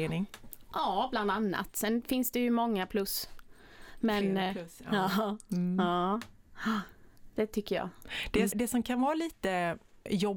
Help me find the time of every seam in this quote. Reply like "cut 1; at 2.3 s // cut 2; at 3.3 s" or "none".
cut 1; at 8.5 s